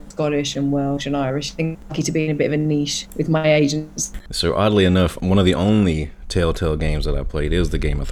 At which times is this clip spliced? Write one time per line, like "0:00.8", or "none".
none